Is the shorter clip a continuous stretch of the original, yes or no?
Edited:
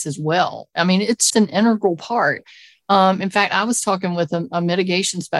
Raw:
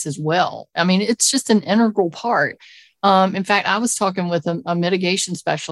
no